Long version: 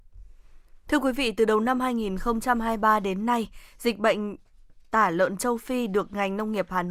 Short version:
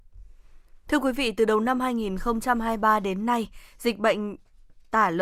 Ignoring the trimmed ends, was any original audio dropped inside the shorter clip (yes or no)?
no